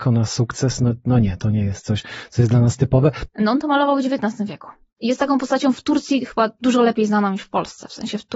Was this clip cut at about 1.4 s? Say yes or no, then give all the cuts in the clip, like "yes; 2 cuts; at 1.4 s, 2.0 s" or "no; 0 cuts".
no; 2 cuts; at 3.3 s, 5.0 s